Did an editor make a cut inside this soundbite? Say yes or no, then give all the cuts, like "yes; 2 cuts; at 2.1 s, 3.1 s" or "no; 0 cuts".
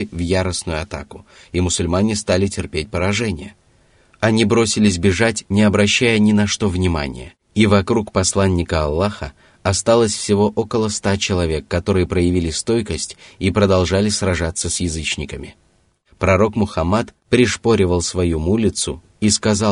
no; 0 cuts